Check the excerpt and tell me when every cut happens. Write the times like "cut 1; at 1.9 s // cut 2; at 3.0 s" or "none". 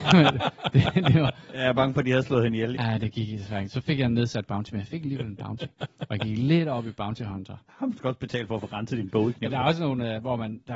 cut 1; at 2.8 s